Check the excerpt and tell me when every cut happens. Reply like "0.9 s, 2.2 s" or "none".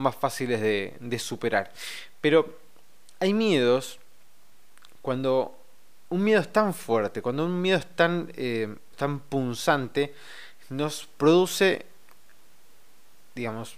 8.9 s